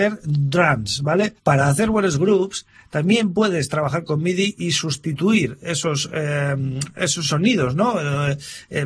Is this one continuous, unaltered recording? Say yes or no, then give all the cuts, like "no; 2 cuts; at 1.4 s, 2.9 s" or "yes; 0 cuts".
yes; 0 cuts